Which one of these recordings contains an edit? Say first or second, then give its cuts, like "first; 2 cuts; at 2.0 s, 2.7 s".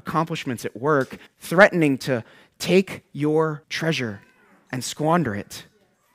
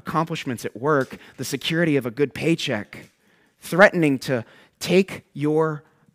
first; 2 cuts; at 1.3 s, 3.6 s